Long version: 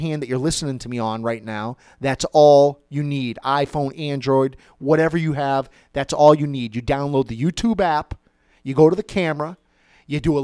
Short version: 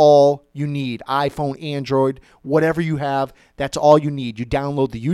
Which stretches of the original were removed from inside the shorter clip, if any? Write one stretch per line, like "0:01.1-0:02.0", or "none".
none